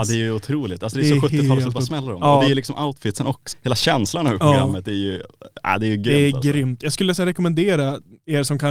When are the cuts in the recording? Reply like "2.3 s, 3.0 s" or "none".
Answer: 3.5 s